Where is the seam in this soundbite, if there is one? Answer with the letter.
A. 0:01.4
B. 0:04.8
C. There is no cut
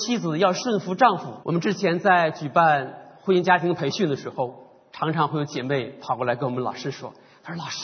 A